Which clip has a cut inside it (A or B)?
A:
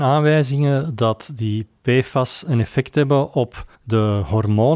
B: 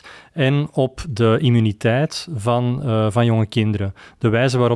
A